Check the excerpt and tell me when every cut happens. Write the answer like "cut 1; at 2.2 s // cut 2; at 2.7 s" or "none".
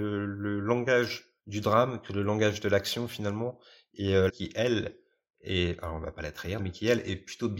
cut 1; at 1.4 s // cut 2; at 4.3 s // cut 3; at 6.6 s